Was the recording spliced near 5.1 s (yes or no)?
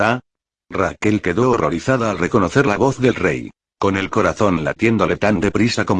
no